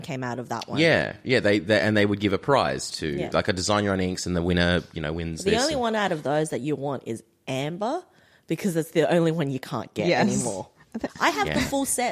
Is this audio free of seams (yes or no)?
no